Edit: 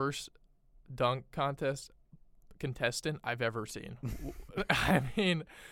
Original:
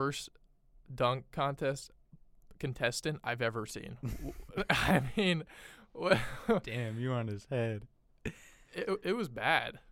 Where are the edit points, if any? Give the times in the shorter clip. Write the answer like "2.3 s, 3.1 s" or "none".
none